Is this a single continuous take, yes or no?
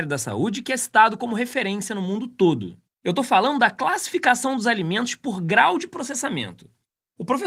no